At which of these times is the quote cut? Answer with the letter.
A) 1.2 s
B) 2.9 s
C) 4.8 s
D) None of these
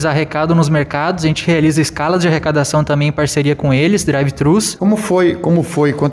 C